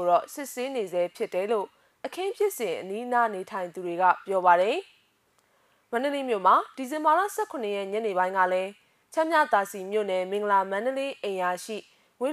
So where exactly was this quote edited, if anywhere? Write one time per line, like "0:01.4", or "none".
none